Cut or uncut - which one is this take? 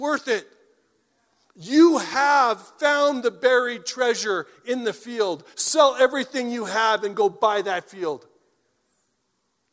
uncut